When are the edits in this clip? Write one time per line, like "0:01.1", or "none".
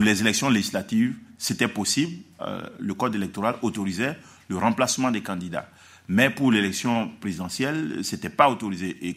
0:02.4